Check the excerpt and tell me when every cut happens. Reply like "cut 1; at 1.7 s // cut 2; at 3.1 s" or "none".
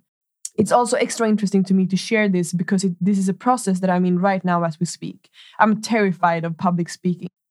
none